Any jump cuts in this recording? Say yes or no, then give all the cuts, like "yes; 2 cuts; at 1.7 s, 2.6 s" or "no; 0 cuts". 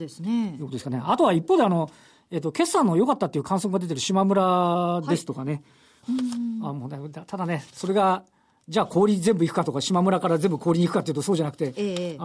yes; 1 cut; at 6.0 s